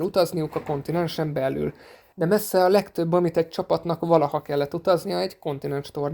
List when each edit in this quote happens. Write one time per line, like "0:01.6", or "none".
0:02.1